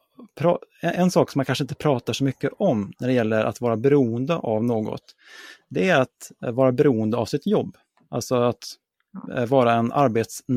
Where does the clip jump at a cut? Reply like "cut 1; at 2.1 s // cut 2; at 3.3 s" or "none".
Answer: none